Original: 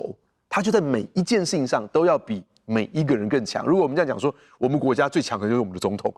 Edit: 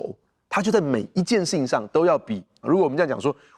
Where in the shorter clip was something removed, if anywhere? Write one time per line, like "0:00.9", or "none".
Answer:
0:02.6